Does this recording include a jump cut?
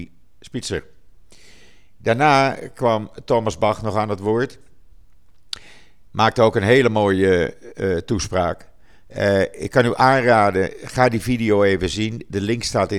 no; 0 cuts

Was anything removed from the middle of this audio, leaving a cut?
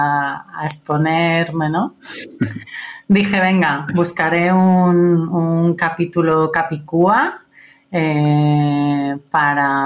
no; 0 cuts

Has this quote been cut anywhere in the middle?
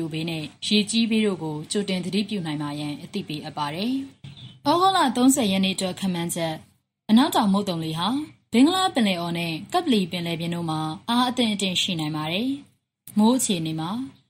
no; 0 cuts

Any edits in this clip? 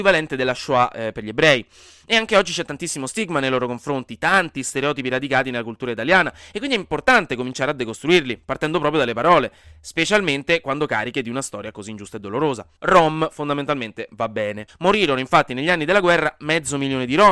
yes; 2 cuts; at 12.8 s, 14.7 s

